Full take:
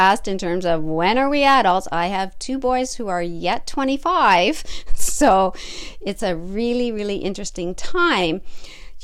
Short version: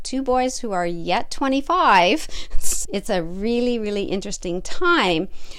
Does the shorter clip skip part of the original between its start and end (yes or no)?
yes